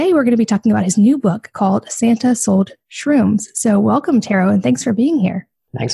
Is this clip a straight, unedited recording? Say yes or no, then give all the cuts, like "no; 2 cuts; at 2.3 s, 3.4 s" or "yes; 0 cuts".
yes; 0 cuts